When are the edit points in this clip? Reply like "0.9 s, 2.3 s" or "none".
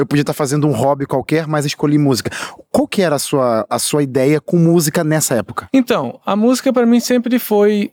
none